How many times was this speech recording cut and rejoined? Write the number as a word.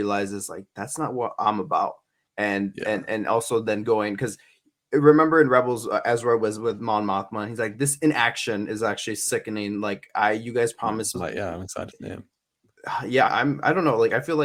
two